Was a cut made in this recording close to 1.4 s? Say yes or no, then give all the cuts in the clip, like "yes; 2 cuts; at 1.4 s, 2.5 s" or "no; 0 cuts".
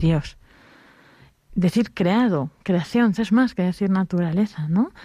no; 1 cut; at 3.2 s